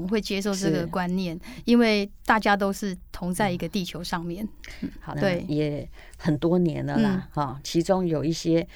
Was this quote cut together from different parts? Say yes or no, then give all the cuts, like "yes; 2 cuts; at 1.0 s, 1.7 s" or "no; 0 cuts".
yes; 1 cut; at 5.1 s